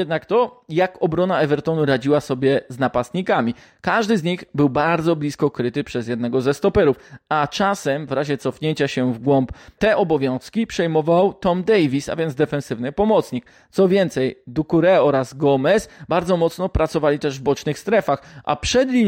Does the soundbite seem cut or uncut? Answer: uncut